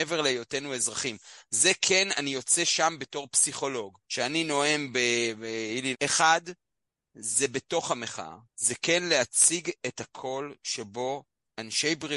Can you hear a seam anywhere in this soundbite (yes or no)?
yes